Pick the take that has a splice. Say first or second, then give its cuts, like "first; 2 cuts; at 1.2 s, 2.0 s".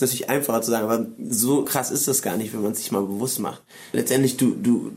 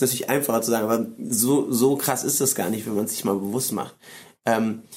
first; 2 cuts; at 1.6 s, 3.9 s